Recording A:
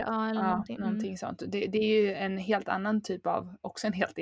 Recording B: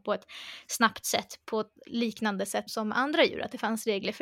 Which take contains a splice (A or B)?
B